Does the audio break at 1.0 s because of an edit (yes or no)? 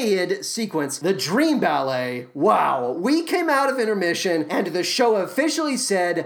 no